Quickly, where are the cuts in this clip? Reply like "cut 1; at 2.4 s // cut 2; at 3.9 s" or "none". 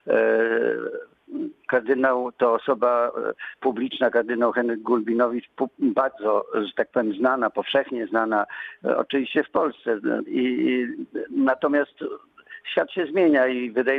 cut 1; at 10.3 s